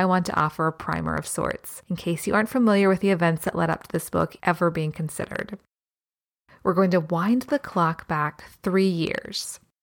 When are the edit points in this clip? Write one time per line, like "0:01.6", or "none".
none